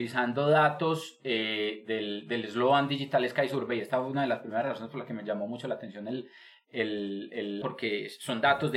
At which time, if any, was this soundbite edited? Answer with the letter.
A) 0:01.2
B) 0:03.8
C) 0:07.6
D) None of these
C